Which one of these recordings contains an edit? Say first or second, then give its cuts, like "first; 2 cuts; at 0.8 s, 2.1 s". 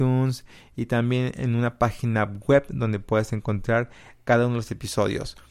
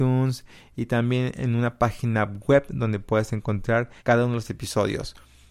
second; 1 cut; at 4.0 s